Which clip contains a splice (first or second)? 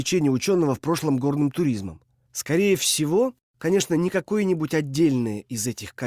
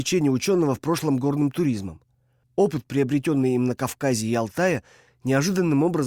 first